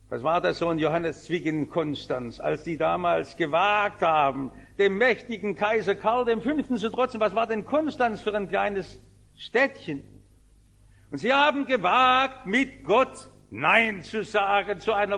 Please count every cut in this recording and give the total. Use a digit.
0